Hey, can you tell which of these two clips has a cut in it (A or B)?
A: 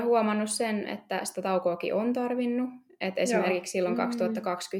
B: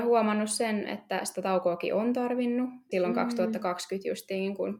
B